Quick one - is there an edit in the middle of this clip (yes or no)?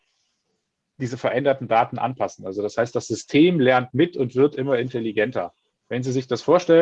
no